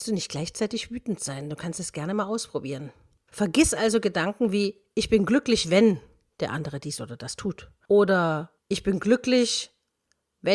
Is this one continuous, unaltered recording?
yes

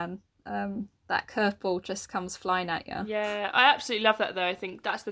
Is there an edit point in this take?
no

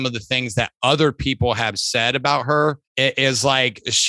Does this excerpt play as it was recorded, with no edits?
no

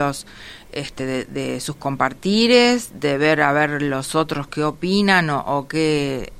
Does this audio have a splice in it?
no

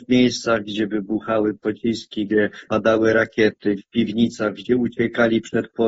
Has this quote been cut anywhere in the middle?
yes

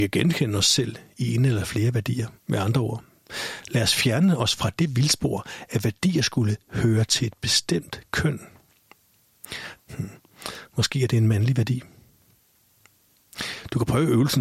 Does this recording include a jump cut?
yes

